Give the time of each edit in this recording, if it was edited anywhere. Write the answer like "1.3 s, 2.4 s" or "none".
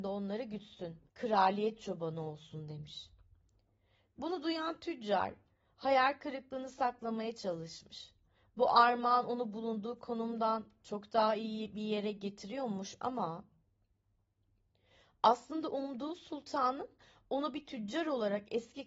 1.1 s